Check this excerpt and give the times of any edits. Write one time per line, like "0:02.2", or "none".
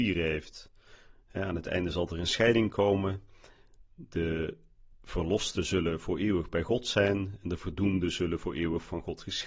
none